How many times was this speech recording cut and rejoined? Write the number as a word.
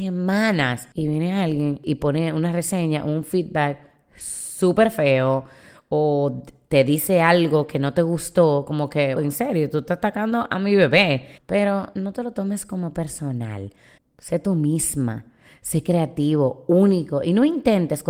three